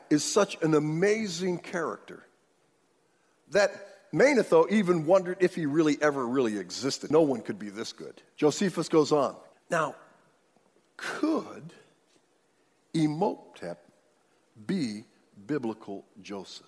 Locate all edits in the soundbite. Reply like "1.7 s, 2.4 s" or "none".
7.1 s, 8.3 s, 9.5 s